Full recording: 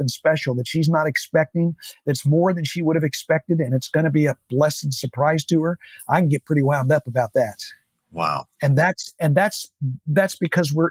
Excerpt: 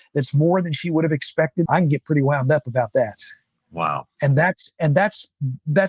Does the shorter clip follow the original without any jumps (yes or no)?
no